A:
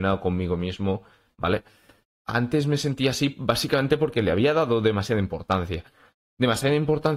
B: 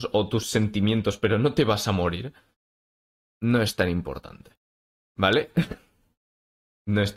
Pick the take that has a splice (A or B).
A